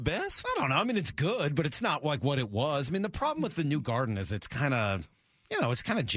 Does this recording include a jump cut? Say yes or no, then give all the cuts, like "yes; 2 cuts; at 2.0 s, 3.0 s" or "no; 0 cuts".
no; 0 cuts